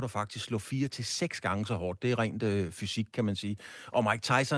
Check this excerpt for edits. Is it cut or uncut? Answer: uncut